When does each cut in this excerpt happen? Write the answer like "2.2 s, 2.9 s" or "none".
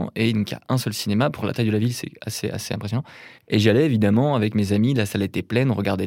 3.4 s